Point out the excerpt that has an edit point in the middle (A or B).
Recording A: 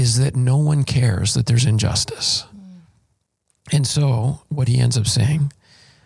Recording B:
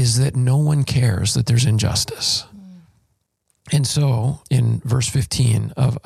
B